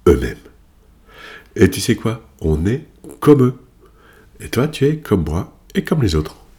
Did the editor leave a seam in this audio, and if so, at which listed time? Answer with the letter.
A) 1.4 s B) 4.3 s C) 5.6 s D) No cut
B